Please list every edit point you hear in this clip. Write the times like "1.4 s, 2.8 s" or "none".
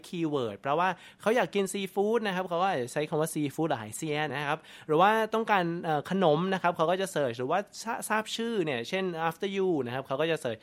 4.3 s